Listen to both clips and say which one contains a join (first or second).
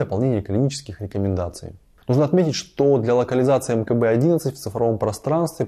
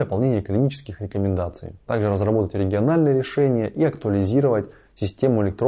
second